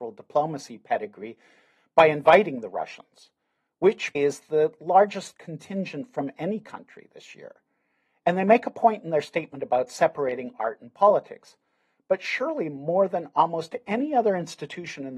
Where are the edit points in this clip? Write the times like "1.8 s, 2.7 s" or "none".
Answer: 4.1 s